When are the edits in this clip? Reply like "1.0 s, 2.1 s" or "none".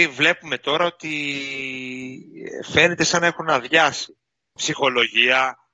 4.6 s